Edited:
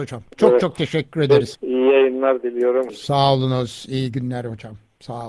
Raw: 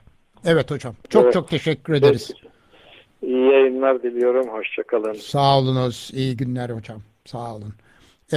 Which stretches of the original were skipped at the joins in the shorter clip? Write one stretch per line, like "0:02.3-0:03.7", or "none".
0:02.3-0:03.1
0:04.5-0:05.1